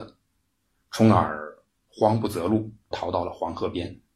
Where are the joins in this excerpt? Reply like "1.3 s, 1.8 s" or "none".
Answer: 2.9 s